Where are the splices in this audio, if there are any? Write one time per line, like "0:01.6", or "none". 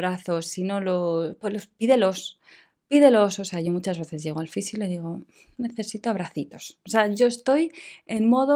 none